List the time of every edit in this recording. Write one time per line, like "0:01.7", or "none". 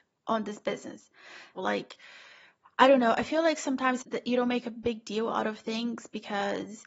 0:01.5
0:04.0